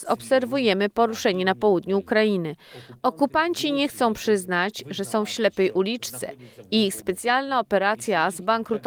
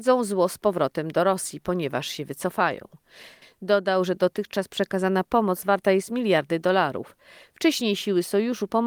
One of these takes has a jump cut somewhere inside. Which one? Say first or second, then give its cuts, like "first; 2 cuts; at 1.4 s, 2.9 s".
second; 1 cut; at 3.4 s